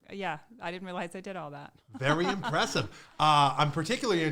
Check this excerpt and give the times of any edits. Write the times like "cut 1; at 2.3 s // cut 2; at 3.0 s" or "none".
none